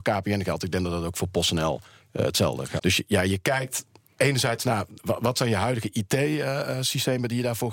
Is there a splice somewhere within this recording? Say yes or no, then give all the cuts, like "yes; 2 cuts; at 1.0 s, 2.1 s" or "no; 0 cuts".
yes; 1 cut; at 2.8 s